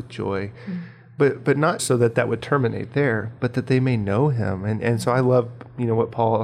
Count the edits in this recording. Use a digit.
1